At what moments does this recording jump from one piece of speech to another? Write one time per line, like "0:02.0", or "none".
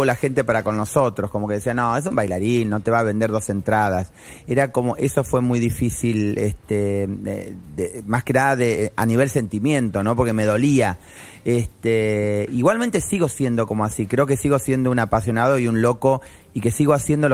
none